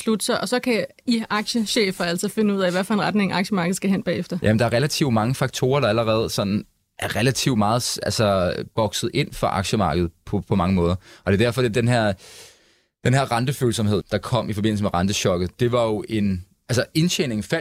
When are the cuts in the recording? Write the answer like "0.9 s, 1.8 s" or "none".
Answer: 11.7 s, 14.0 s